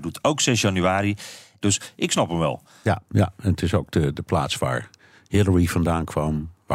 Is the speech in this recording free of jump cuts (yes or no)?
no